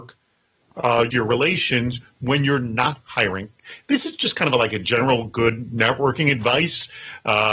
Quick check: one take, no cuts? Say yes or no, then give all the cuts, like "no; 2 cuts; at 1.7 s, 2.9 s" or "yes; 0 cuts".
no; 1 cut; at 1.1 s